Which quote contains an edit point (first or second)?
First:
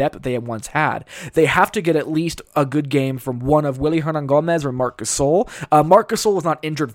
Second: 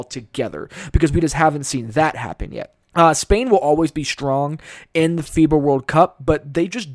second